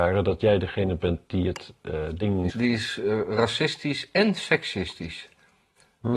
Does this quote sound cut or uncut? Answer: cut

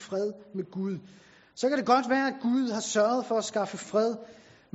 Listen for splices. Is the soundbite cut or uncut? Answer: uncut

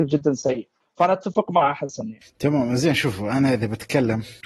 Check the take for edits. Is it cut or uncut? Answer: uncut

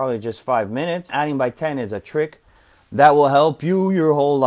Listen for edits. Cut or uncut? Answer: cut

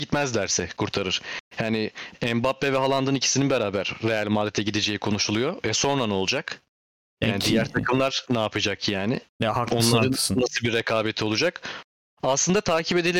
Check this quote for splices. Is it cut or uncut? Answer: cut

